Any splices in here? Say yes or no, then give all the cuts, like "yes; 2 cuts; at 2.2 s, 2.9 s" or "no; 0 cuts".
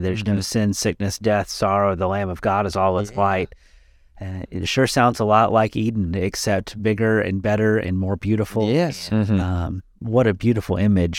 yes; 1 cut; at 9.1 s